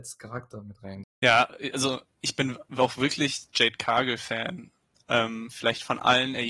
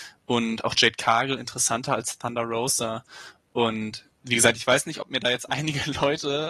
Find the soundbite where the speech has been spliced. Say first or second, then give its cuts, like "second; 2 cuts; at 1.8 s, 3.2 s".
first; 1 cut; at 1.0 s